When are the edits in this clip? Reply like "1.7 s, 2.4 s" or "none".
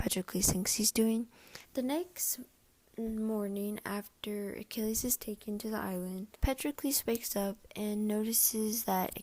1.6 s, 6.3 s